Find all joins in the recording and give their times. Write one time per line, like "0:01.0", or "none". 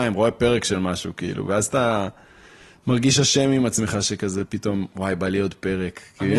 none